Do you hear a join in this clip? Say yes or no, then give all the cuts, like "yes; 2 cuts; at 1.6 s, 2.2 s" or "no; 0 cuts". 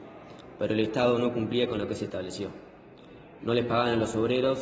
yes; 1 cut; at 3.4 s